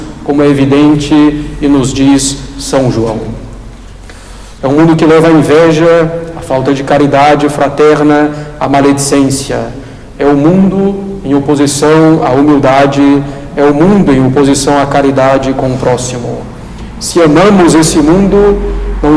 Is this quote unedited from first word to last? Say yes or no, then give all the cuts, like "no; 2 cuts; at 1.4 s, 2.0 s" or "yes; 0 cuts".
no; 1 cut; at 4.6 s